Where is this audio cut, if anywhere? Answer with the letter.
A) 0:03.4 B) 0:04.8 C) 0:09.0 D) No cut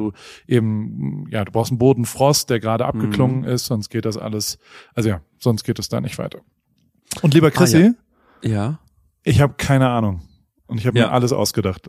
D